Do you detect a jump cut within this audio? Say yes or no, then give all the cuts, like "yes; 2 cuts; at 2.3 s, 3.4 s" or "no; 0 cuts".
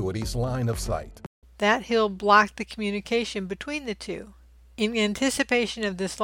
yes; 1 cut; at 1.4 s